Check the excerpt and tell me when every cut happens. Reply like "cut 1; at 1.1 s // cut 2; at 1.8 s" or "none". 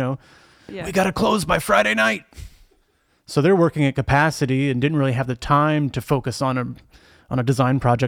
none